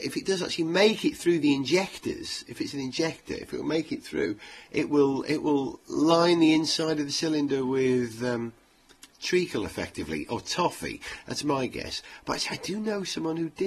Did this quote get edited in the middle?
no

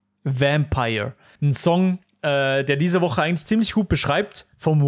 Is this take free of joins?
no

